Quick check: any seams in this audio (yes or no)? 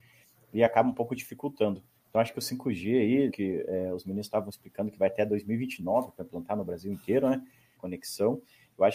yes